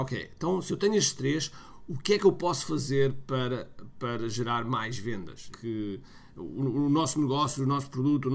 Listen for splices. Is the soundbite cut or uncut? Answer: cut